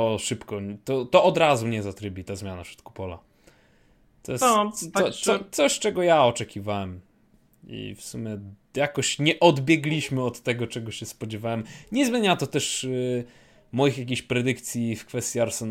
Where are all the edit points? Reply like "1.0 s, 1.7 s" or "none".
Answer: none

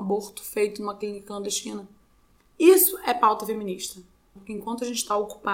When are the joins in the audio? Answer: 4.4 s

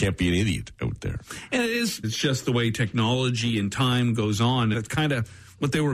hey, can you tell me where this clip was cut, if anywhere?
2.0 s, 4.7 s

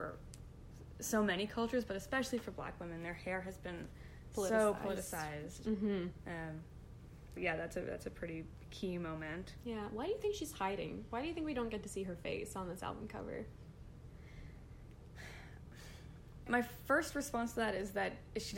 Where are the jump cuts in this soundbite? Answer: 7.4 s, 16.5 s

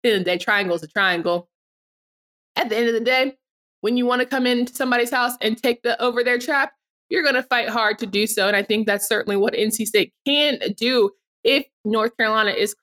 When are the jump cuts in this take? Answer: none

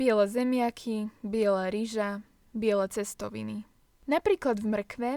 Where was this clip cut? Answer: 4.0 s

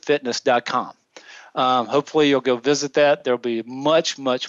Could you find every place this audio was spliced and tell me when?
none

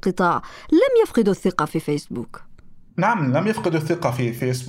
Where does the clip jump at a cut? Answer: 2.9 s

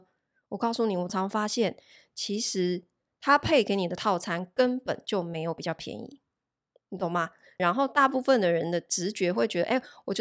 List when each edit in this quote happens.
1.1 s, 7.6 s

